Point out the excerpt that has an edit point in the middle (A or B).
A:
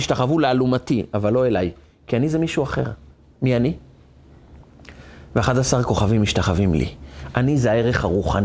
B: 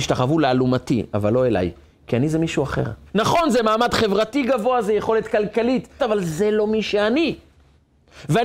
B